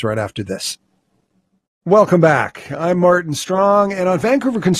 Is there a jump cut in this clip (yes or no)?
no